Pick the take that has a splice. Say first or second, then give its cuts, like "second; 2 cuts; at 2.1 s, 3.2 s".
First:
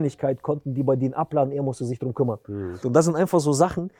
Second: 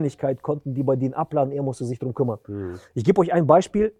first; 1 cut; at 2.8 s